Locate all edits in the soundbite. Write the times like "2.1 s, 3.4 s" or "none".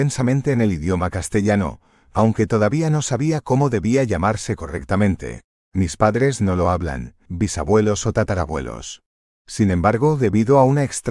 7.3 s, 9.3 s